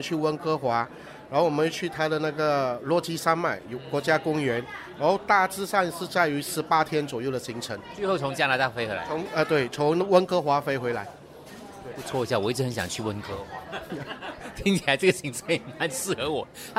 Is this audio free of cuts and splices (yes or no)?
yes